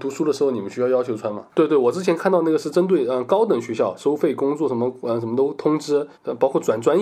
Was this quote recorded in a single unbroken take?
no; 1 cut; at 1.5 s

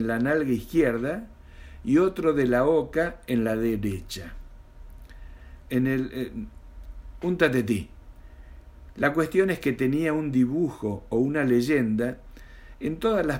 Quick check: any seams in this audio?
yes; 2 cuts; at 5.6 s, 8.9 s

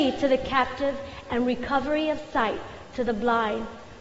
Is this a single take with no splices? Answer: yes; 0 cuts

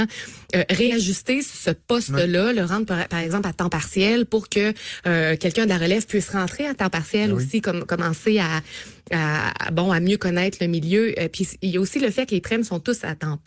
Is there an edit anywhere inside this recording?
no; 0 cuts

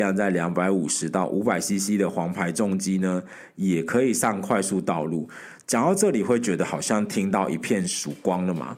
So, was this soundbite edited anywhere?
no; 0 cuts

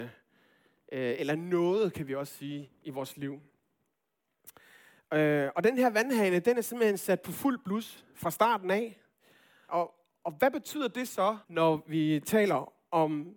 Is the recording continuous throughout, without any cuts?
no; 2 cuts; at 9.7 s, 11.4 s

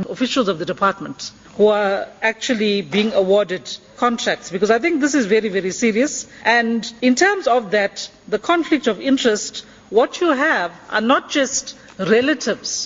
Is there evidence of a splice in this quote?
no; 0 cuts

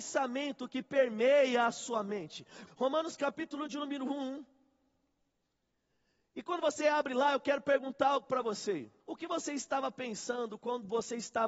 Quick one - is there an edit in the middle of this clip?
yes; 2 cuts; at 2.7 s, 9.0 s

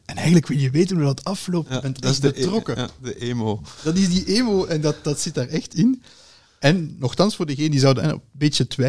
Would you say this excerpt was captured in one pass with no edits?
yes; 0 cuts

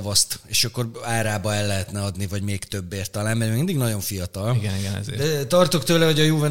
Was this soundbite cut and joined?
no; 0 cuts

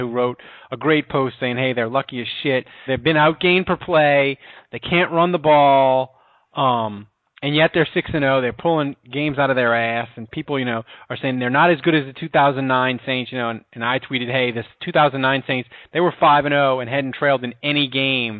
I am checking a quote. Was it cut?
yes; 1 cut; at 2.9 s

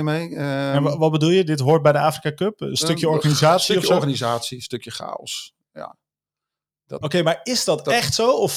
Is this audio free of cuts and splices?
no; 1 cut; at 7.0 s

